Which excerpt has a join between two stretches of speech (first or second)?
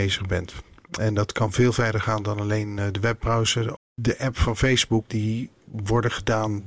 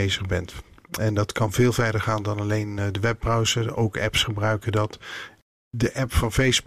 first